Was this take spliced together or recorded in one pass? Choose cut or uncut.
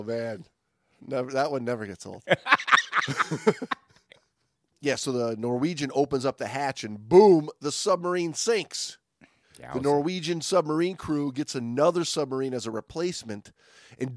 uncut